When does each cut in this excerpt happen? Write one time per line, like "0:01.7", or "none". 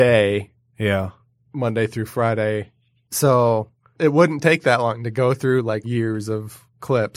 0:05.8